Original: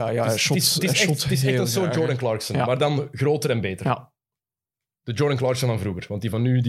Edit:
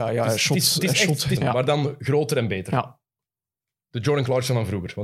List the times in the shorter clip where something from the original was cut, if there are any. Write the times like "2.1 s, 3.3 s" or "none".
1.4 s